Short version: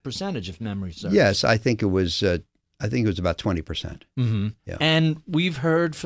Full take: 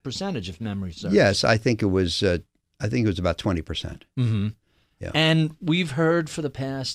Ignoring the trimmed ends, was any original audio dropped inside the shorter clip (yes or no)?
yes